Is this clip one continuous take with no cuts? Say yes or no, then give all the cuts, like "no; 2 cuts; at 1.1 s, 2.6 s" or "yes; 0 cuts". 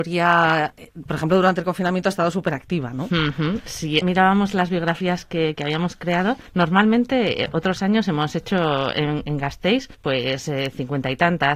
yes; 0 cuts